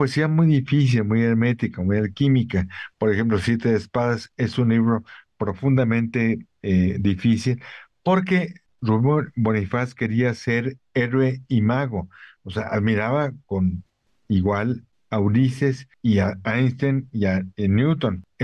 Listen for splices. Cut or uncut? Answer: uncut